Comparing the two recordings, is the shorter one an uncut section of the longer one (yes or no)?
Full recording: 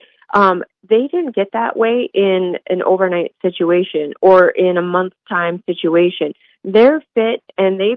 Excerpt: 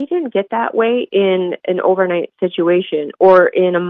yes